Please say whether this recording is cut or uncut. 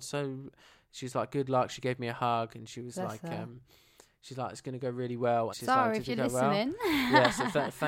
cut